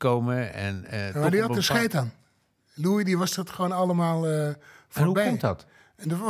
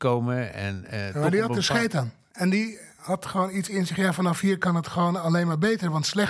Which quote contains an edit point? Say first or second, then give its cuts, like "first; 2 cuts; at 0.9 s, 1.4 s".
second; 1 cut; at 2.3 s